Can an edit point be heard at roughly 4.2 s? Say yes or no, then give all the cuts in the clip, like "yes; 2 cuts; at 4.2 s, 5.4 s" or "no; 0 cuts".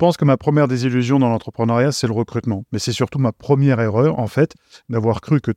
no; 0 cuts